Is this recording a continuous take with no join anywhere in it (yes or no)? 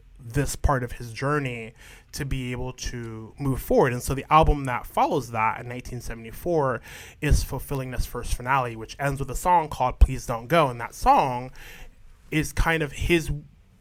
yes